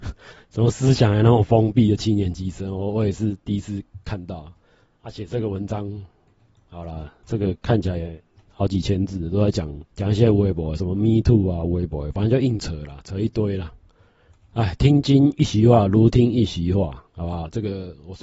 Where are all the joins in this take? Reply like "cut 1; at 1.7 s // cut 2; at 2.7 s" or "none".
cut 1; at 9.9 s // cut 2; at 14.4 s